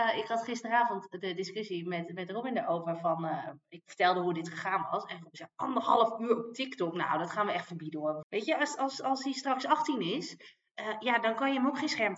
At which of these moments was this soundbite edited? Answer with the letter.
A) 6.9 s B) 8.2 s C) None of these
B